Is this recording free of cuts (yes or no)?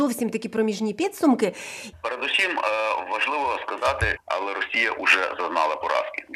no